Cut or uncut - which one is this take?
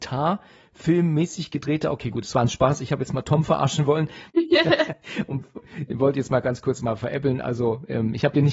uncut